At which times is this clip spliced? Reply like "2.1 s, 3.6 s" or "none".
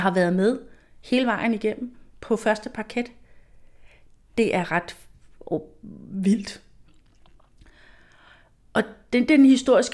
none